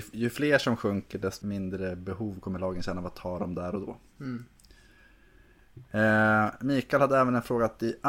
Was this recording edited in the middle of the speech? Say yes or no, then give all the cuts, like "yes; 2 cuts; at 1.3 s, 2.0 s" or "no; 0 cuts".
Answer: yes; 1 cut; at 1.4 s